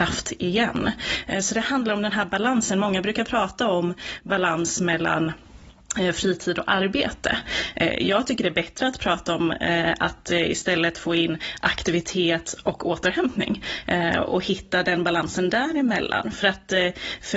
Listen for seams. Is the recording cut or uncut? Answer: uncut